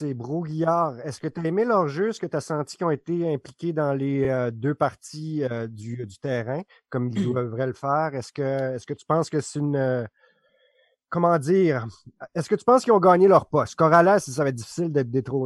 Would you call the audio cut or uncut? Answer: uncut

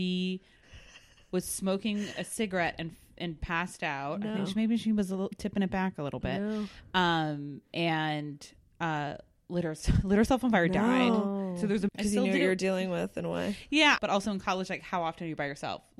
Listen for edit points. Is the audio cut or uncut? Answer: cut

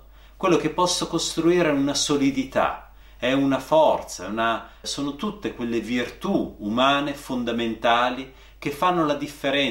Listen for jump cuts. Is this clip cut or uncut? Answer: cut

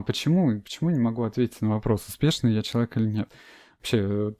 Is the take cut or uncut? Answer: uncut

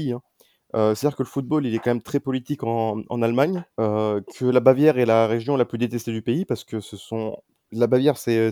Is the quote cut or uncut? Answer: cut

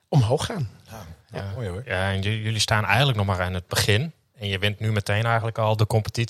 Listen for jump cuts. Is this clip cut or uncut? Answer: uncut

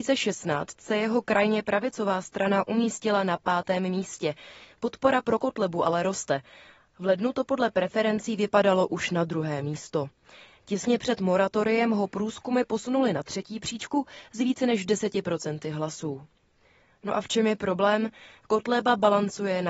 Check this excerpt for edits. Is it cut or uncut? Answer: uncut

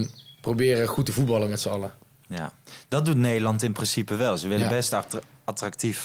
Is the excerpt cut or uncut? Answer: uncut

